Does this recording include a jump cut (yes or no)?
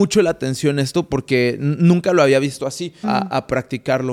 yes